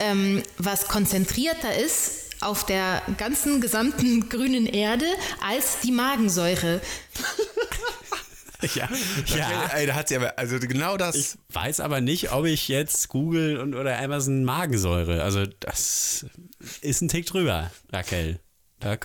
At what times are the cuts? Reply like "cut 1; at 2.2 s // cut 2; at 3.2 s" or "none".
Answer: none